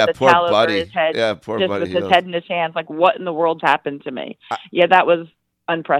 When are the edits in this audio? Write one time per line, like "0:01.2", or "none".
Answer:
0:03.6